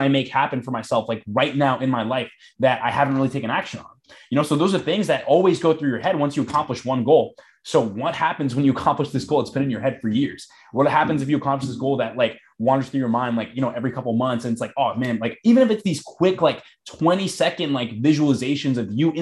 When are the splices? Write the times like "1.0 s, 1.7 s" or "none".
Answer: none